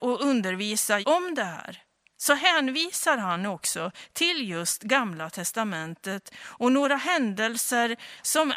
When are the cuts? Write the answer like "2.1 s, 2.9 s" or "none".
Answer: 1.0 s